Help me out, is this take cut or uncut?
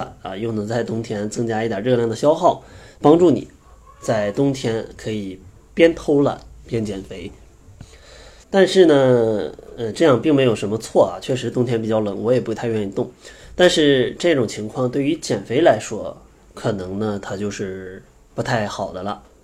cut